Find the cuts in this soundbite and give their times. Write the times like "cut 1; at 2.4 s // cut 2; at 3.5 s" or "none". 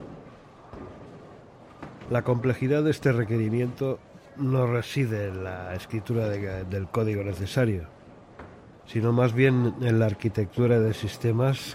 cut 1; at 2.1 s // cut 2; at 4.3 s